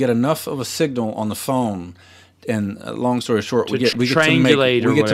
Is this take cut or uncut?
cut